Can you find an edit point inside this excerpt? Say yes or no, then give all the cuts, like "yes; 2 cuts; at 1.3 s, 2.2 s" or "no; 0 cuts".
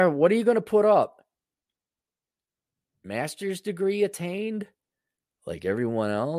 no; 0 cuts